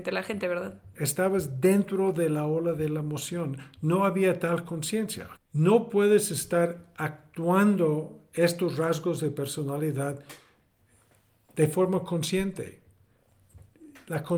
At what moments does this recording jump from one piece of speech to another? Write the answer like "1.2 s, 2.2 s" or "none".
0.9 s, 5.4 s